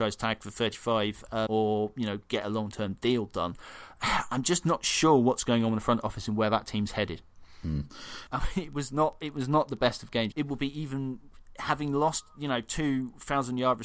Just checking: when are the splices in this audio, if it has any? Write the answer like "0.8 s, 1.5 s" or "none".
1.5 s, 8.3 s, 10.3 s